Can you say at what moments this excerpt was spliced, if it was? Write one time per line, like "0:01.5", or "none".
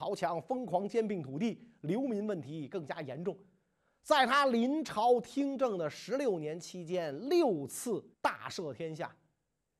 0:03.9
0:08.1